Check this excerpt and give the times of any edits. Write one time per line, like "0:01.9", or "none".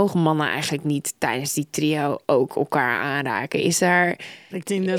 none